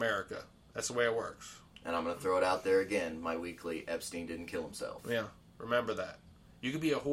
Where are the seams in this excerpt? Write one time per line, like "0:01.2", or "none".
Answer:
0:05.4

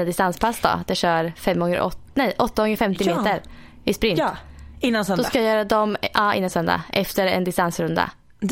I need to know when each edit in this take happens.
none

